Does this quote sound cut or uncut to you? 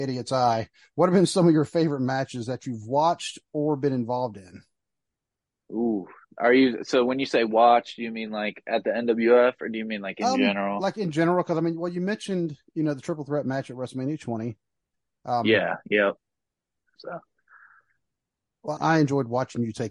cut